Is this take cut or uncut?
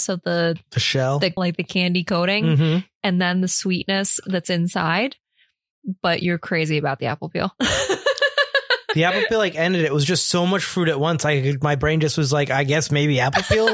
cut